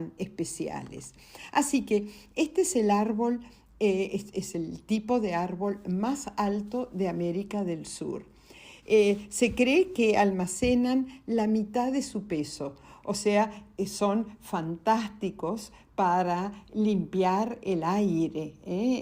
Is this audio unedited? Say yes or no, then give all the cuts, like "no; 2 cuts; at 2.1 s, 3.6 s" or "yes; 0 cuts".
no; 1 cut; at 8.8 s